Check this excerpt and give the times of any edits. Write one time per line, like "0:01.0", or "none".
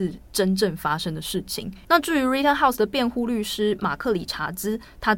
0:01.8

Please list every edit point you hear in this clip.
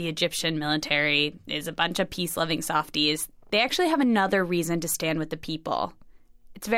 none

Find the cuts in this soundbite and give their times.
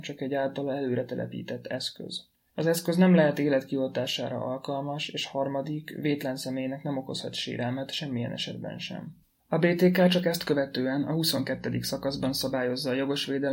none

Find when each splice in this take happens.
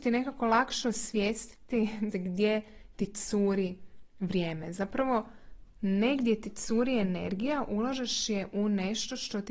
0:02.1

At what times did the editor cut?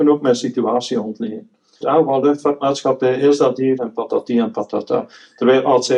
0:01.8
0:03.8

